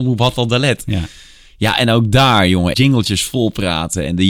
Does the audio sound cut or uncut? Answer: cut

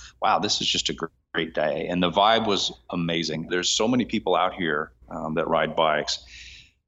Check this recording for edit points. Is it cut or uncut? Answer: cut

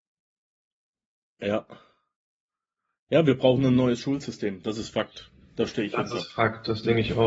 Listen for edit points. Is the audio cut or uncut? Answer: uncut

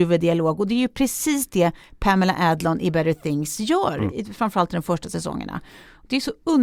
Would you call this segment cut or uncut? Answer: uncut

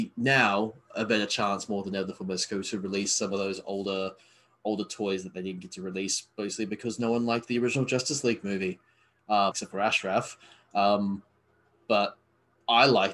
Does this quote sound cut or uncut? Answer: cut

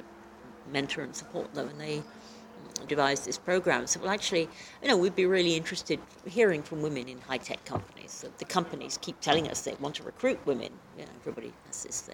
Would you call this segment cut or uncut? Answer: cut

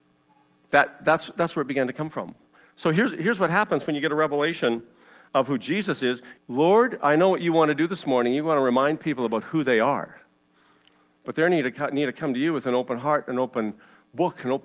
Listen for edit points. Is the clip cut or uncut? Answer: cut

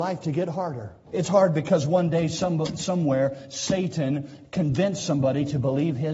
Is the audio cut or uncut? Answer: cut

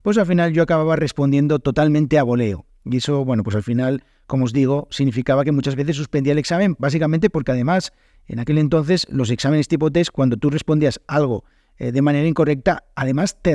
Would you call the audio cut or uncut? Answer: uncut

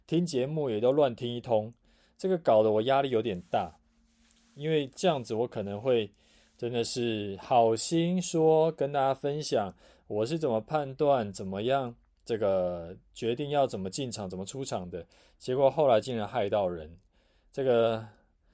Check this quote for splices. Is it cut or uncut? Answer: uncut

